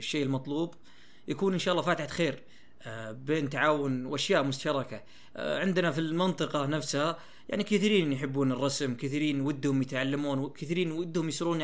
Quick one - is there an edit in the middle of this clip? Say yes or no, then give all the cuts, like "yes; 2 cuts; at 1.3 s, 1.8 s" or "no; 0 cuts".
no; 0 cuts